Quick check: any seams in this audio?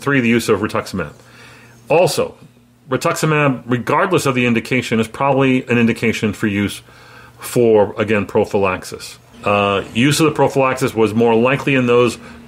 yes; 1 cut; at 9.3 s

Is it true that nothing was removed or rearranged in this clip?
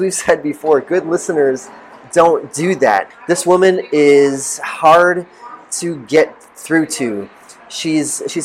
no; 1 cut; at 3.1 s

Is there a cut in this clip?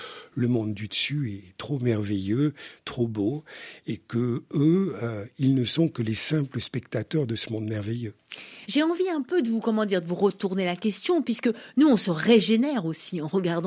yes; 1 cut; at 8.6 s

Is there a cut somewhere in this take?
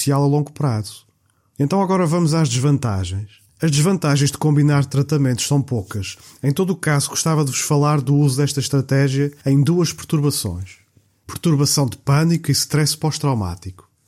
yes; 1 cut; at 1.5 s

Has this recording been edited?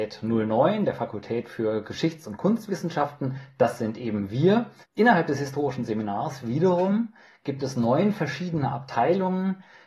yes; 1 cut; at 4.8 s

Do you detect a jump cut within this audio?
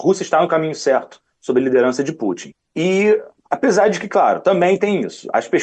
no; 0 cuts

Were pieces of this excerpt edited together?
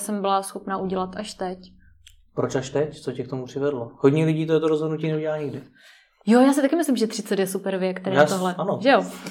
no; 0 cuts

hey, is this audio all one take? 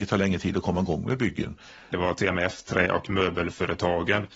no; 1 cut; at 1.9 s

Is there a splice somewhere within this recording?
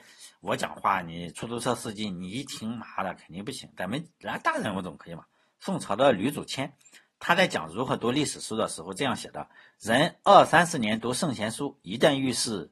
no; 0 cuts

